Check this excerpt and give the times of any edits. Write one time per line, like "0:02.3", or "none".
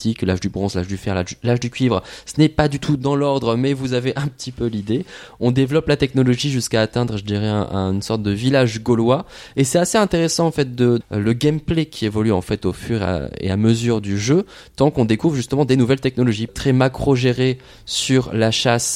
0:11.0
0:16.5